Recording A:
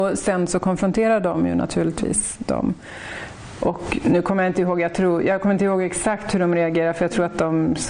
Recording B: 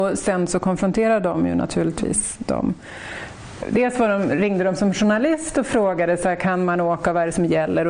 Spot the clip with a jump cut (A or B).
B